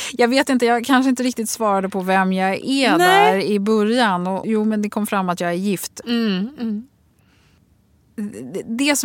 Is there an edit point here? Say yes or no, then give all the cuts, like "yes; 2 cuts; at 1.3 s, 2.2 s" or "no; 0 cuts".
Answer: yes; 2 cuts; at 4.4 s, 6.0 s